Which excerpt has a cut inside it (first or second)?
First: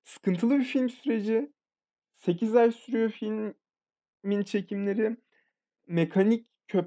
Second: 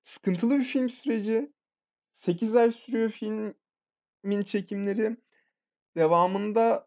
first